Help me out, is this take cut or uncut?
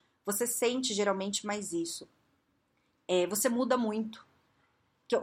uncut